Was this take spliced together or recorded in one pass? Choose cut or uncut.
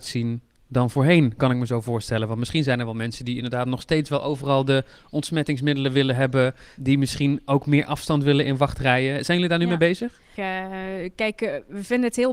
cut